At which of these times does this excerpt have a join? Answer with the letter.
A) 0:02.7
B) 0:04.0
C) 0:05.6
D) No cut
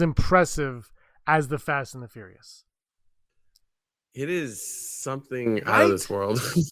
D